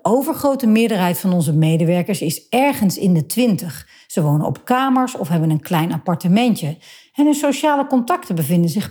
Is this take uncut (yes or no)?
yes